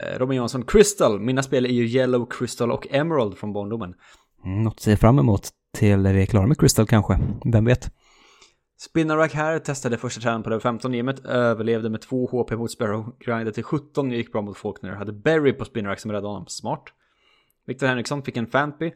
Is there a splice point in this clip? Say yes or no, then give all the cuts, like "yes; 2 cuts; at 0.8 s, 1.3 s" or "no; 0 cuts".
no; 0 cuts